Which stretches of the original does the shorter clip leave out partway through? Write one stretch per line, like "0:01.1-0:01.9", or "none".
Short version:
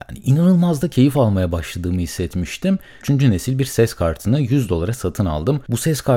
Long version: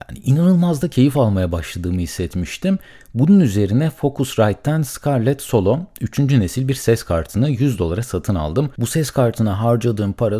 0:03.0-0:06.1